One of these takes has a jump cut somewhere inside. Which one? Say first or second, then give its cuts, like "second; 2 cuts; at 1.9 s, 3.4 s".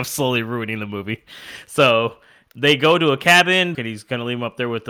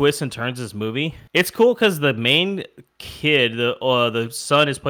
first; 1 cut; at 3.7 s